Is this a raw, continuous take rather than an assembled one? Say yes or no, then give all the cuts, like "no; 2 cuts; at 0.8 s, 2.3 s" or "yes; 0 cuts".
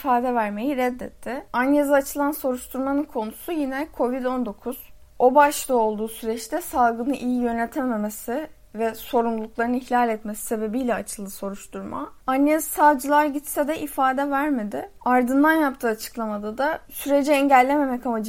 yes; 0 cuts